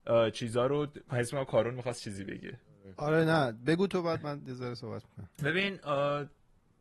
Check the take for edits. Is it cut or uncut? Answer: cut